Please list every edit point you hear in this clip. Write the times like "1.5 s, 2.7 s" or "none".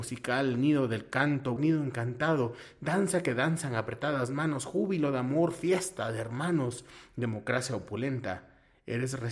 1.6 s